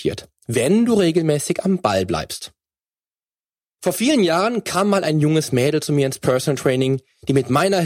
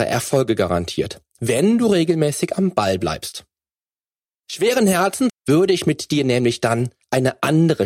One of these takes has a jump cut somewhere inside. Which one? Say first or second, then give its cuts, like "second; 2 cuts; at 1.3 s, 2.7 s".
second; 2 cuts; at 4.3 s, 5.3 s